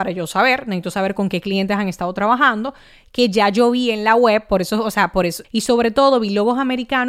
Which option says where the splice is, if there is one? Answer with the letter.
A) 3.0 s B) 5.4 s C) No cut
B